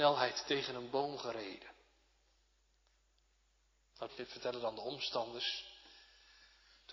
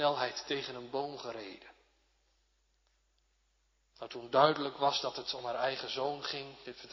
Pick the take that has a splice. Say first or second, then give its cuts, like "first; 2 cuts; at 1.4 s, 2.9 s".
first; 1 cut; at 4.1 s